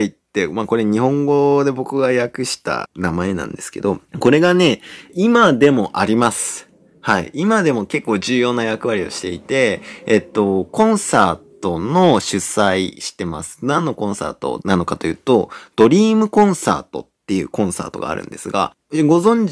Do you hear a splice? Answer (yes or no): yes